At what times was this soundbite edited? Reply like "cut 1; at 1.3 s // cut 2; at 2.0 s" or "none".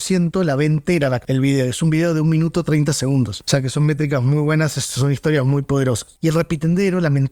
cut 1; at 6.2 s